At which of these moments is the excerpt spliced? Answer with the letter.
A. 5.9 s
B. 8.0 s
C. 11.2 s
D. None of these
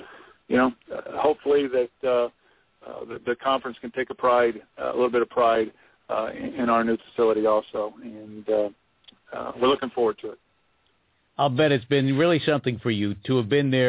D